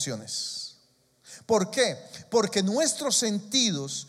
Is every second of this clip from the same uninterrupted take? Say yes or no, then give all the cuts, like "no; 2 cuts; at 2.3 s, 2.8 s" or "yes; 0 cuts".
yes; 0 cuts